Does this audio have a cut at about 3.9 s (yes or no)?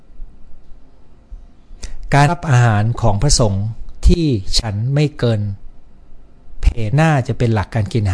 no